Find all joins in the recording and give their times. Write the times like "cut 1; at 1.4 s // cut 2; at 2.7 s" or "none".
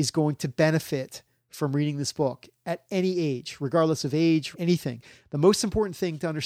cut 1; at 4.5 s